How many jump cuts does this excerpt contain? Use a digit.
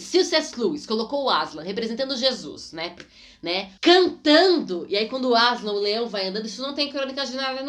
1